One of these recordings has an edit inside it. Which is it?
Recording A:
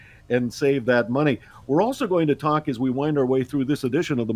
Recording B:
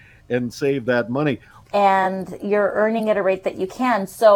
B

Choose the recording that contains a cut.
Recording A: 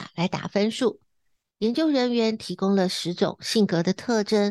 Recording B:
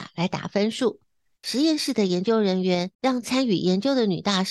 B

